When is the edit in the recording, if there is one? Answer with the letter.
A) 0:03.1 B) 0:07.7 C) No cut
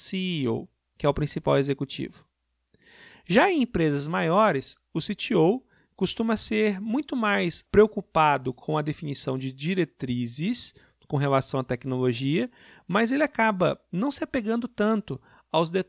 B